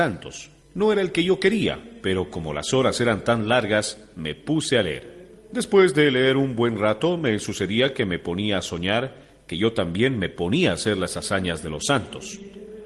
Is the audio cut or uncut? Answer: uncut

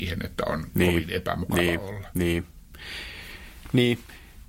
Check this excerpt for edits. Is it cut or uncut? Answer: uncut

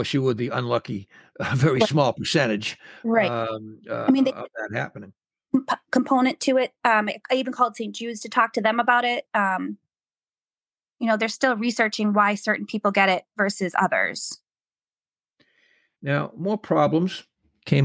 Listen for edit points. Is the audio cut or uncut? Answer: uncut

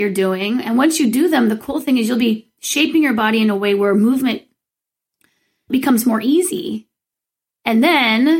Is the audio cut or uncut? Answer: uncut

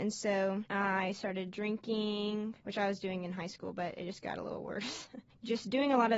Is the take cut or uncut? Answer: uncut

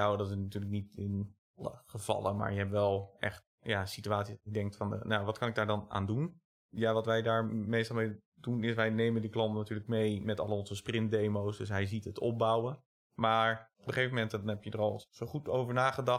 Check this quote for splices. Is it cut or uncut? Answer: uncut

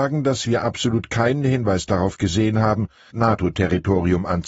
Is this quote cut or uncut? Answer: cut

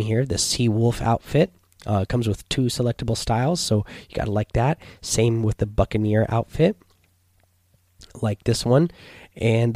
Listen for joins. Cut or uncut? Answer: uncut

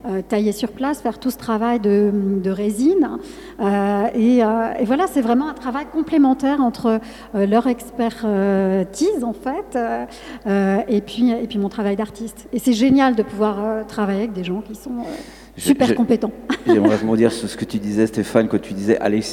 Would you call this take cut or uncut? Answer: uncut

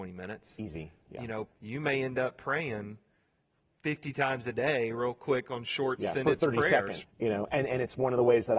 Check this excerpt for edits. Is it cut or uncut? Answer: cut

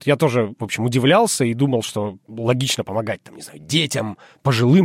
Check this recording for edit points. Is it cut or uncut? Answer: uncut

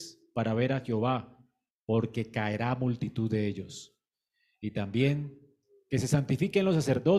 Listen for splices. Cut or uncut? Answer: uncut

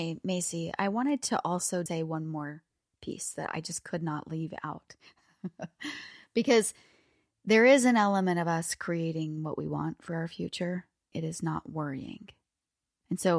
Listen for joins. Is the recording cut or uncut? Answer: cut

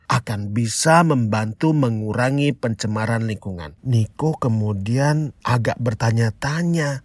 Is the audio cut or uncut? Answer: cut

